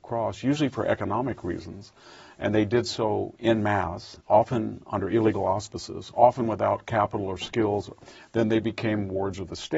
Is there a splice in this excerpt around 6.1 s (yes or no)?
no